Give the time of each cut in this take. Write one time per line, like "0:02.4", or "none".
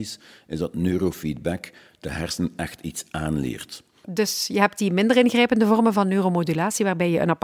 0:04.0